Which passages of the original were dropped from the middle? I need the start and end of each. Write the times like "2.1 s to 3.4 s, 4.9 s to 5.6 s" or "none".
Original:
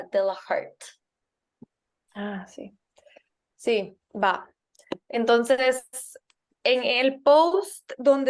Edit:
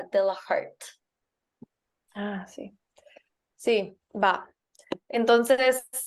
none

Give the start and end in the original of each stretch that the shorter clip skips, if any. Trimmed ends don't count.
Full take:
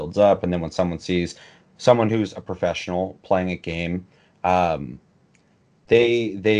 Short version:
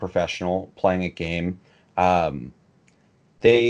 none

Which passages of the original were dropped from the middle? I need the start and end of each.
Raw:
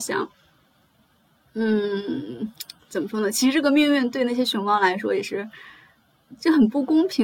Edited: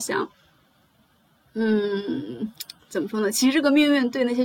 none

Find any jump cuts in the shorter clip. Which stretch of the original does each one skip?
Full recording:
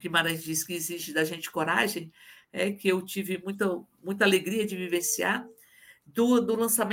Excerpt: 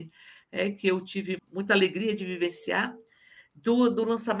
3.4 s to 3.9 s

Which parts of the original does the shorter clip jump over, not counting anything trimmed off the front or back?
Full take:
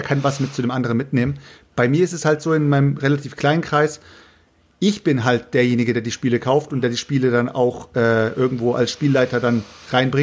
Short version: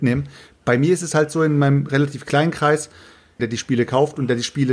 4.5 s to 5.9 s

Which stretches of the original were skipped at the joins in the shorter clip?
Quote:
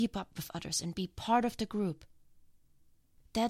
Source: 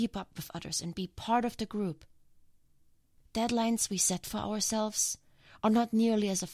none

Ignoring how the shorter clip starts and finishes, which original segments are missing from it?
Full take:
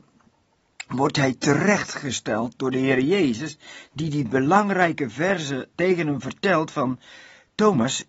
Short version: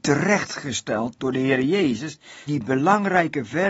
3.9 s to 4.1 s

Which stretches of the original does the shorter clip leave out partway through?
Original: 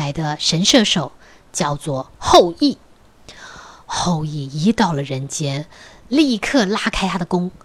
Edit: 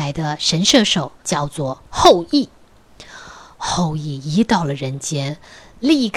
1.2 s to 1.5 s

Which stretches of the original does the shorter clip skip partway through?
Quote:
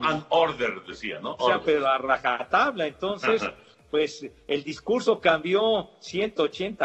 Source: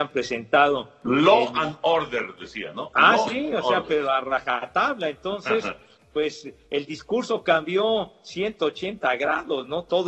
2.9 s to 3.6 s

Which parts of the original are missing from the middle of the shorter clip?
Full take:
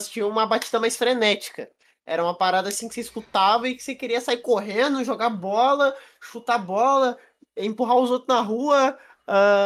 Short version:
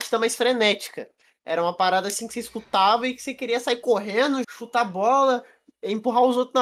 5.0 s to 6.2 s

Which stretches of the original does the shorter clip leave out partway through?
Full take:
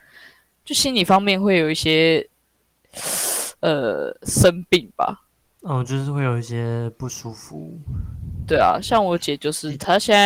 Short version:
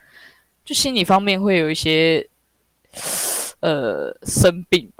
none

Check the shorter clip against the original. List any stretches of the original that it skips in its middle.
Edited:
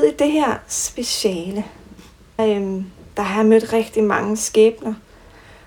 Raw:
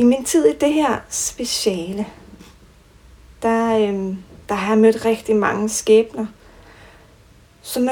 2.8 s to 3.7 s

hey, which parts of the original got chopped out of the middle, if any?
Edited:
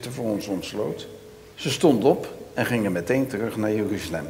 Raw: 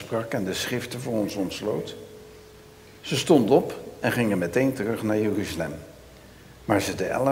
2.4 s to 3.0 s

